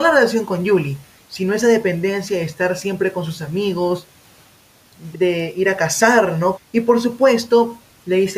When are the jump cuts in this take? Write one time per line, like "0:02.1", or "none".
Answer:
0:05.1
0:06.5